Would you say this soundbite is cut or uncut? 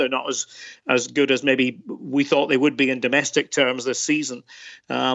uncut